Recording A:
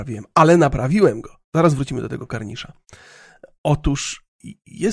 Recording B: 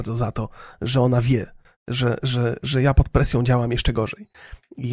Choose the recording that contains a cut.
A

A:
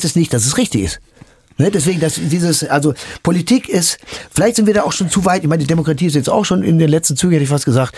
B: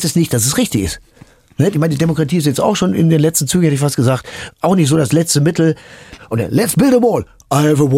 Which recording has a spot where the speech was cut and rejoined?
B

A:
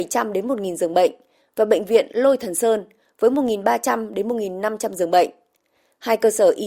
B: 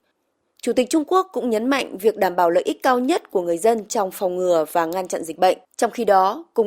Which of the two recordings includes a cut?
B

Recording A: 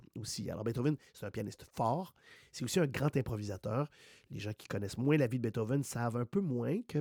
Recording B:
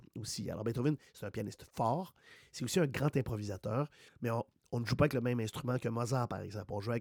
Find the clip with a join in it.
B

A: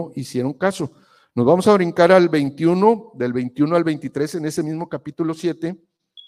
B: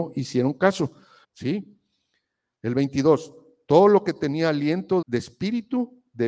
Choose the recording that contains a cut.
B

